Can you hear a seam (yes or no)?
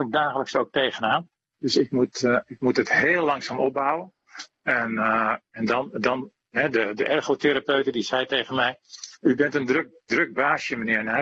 no